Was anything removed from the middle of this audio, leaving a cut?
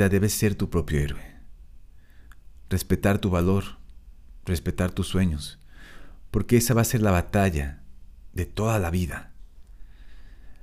no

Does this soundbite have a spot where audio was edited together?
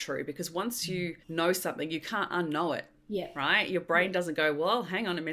yes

